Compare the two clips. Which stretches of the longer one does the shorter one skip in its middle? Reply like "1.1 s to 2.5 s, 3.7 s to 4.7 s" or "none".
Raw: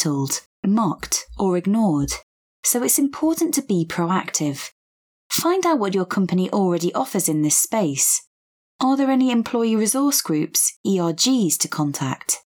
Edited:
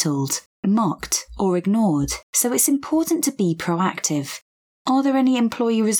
2.2 s to 2.5 s, 5.0 s to 8.6 s